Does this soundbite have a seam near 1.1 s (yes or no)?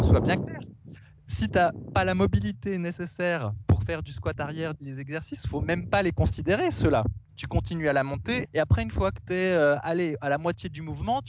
no